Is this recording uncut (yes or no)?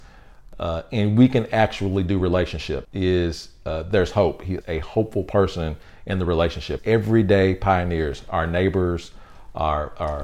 no